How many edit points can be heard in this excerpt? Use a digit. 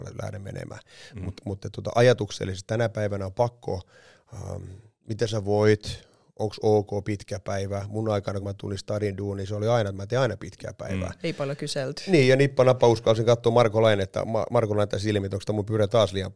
0